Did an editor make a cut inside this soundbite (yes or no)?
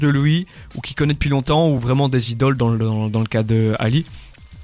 no